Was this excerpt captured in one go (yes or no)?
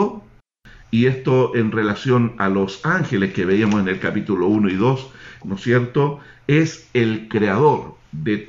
no